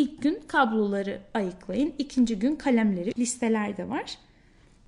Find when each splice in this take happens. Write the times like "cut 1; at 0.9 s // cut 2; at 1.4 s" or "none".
cut 1; at 3.1 s